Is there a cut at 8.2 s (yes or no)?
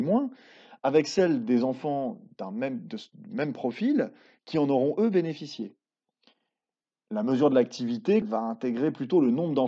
yes